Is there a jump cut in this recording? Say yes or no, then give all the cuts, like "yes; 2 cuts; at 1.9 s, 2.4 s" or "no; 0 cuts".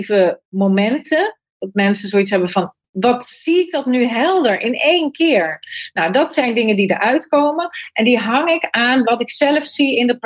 yes; 1 cut; at 2.9 s